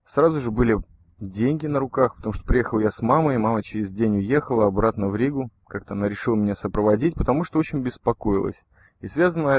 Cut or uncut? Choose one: uncut